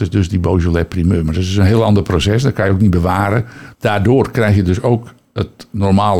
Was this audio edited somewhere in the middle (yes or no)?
yes